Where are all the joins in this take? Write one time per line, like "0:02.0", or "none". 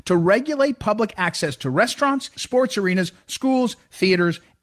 0:02.3